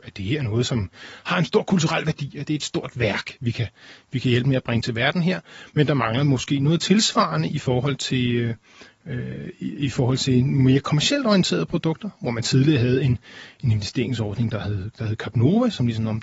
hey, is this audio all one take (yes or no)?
yes